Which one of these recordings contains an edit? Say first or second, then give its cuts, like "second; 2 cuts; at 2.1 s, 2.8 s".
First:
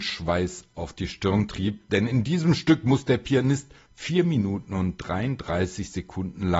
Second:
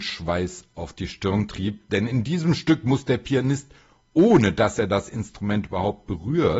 first; 1 cut; at 3.8 s